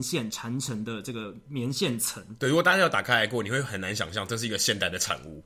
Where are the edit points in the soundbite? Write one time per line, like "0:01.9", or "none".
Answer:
none